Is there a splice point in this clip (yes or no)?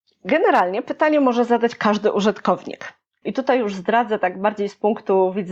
yes